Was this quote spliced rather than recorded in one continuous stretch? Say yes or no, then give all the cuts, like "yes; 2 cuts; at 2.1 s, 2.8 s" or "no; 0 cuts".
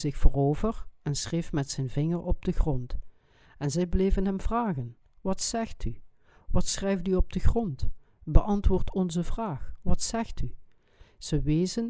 no; 0 cuts